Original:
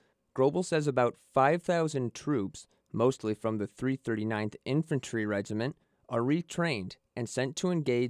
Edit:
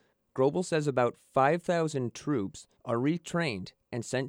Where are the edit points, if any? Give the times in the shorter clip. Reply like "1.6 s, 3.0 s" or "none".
2.8 s